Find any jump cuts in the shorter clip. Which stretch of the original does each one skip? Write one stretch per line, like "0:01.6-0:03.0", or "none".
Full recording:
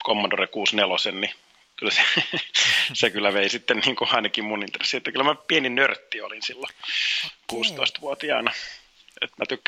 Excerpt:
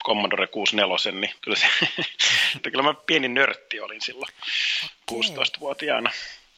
0:01.4-0:01.7
0:02.9-0:05.0